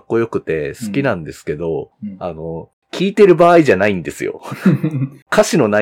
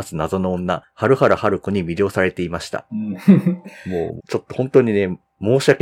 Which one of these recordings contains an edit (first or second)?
second